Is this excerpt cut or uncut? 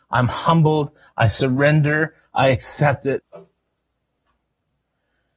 cut